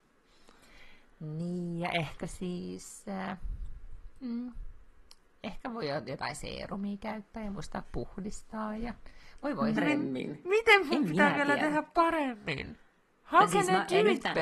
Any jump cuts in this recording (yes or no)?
yes